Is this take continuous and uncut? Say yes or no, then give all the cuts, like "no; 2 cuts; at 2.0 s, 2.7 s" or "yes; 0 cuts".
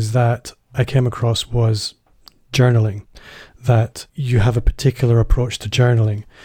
no; 1 cut; at 4.1 s